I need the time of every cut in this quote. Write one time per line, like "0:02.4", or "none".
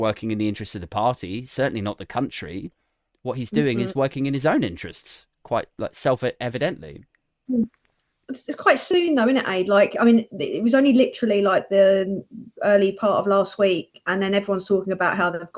none